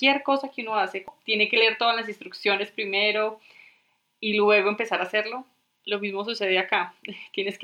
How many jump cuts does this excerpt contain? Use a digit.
0